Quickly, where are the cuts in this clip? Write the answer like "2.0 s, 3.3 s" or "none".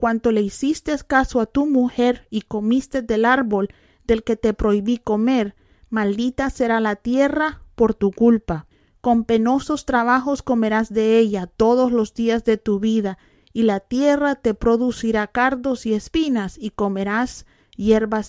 none